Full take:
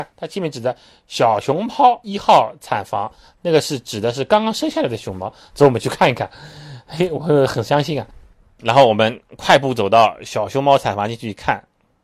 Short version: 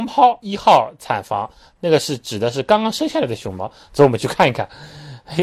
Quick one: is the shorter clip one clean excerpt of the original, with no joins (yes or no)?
yes